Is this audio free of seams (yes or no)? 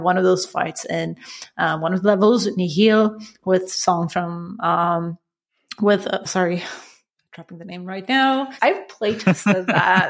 no